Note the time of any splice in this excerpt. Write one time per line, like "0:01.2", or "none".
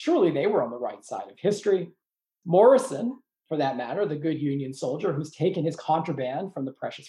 none

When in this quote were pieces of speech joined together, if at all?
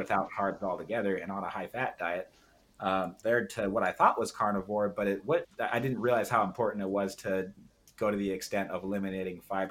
0:03.2
0:05.4

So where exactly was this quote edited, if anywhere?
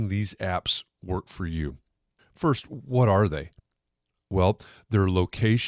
none

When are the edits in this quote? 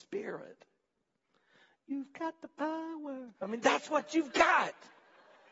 0:03.4

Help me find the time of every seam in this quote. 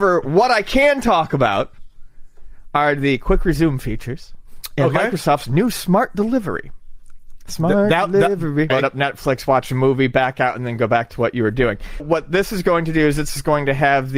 0:08.7
0:12.0

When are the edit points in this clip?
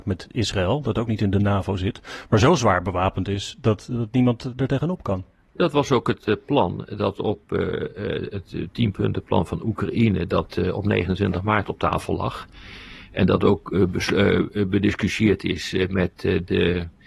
none

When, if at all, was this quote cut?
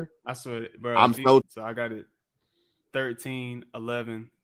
0:01.4

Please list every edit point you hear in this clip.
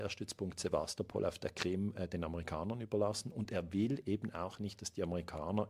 none

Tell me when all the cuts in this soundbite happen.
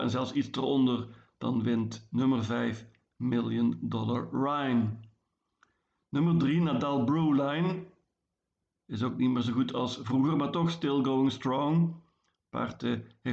none

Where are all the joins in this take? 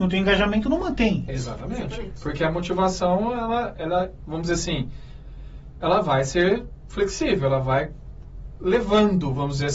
0:01.3

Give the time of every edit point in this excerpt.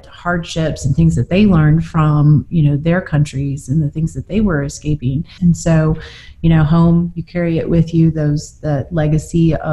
0:05.4

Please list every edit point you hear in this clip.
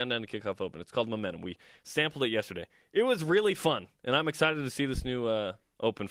none

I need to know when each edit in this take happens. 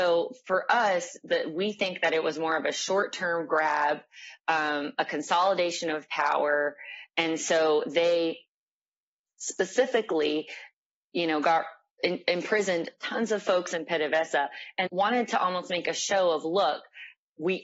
0:07.1
0:14.9

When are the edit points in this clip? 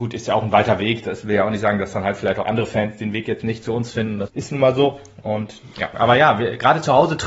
0:04.3
0:05.9

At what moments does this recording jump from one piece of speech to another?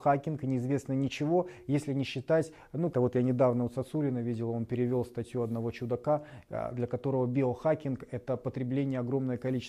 0:02.9

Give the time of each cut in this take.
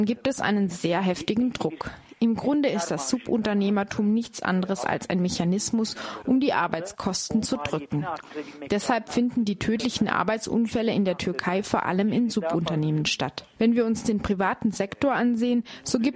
none

